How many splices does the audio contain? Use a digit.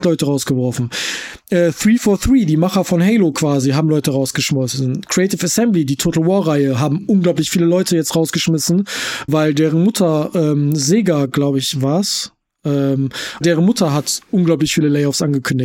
2